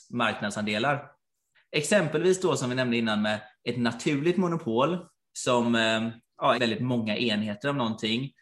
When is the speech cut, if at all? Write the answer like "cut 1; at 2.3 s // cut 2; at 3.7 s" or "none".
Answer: cut 1; at 1.5 s // cut 2; at 6.5 s